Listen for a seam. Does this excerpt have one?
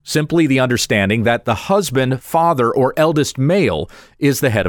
no; 0 cuts

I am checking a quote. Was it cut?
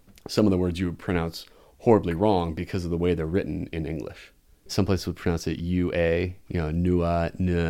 yes; 1 cut; at 4.7 s

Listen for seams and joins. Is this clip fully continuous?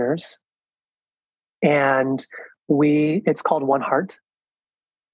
yes; 0 cuts

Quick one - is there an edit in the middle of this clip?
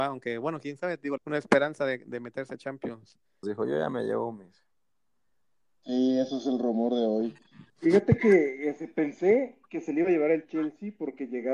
yes; 3 cuts; at 1.2 s, 3.4 s, 7.7 s

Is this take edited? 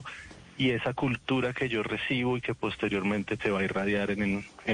yes; 1 cut; at 3.4 s

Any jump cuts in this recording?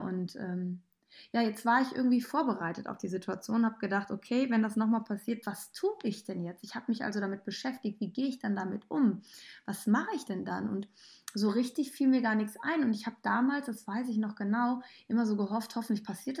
no; 0 cuts

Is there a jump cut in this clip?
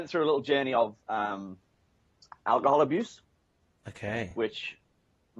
no; 0 cuts

